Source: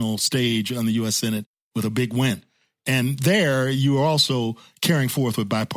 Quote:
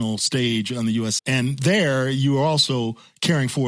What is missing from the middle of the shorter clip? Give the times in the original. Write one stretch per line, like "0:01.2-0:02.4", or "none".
0:01.2-0:02.8